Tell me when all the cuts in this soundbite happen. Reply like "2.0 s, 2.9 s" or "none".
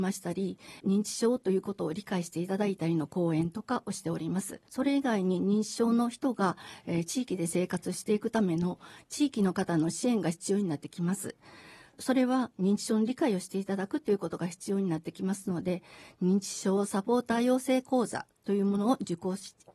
4.7 s